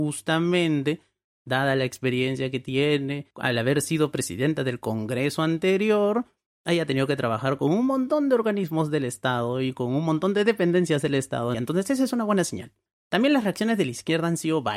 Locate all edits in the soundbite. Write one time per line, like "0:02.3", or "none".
0:11.5